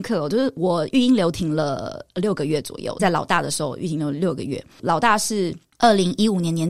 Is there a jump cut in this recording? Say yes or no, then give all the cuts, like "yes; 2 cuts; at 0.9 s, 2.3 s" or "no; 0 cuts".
yes; 1 cut; at 3.0 s